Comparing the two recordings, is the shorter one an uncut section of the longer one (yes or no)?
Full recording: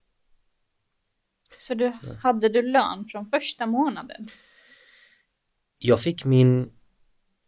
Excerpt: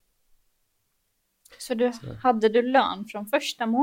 yes